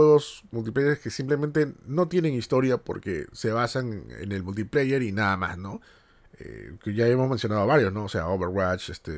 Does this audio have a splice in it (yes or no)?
no